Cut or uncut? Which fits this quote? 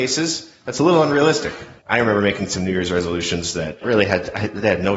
cut